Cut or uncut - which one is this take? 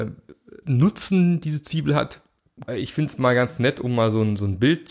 cut